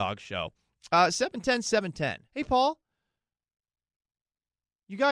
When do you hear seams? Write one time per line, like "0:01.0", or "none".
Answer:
0:02.3